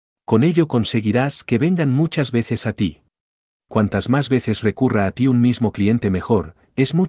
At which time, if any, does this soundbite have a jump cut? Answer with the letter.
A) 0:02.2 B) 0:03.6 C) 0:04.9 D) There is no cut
B